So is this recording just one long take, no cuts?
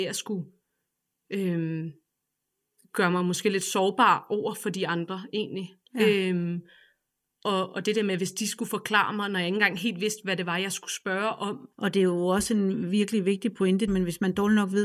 no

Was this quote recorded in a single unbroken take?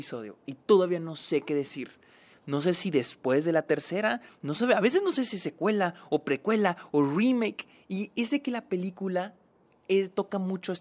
no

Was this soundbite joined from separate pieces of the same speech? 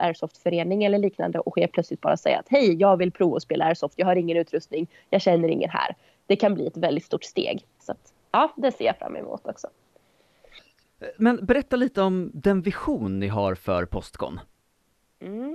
yes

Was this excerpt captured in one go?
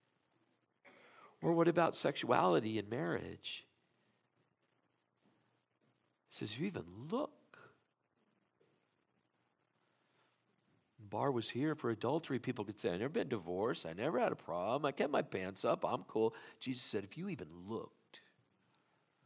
yes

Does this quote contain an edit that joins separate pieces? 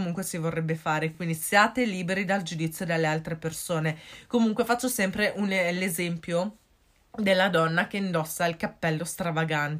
no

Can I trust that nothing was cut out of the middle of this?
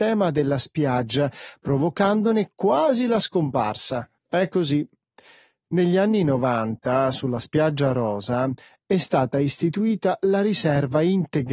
no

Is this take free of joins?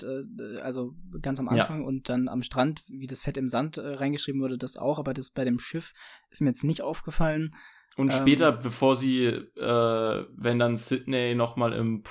yes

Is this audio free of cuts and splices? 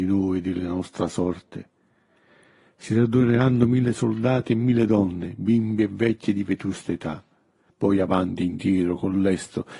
no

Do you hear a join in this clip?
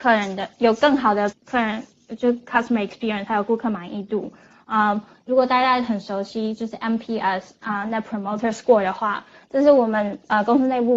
yes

